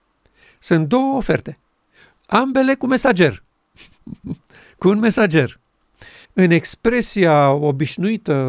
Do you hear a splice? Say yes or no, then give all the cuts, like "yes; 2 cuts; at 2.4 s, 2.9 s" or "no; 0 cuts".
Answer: yes; 1 cut; at 6.2 s